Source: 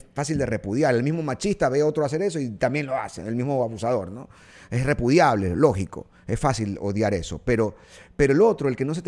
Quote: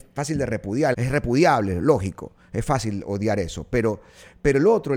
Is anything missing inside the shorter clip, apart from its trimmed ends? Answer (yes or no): yes